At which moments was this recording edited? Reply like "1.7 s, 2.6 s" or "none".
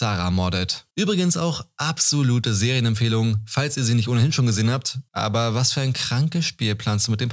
0.9 s, 5.1 s